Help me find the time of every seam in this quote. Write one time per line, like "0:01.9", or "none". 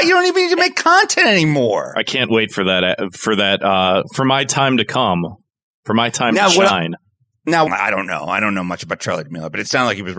0:07.7